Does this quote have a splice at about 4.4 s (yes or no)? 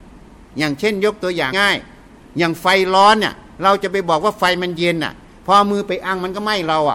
no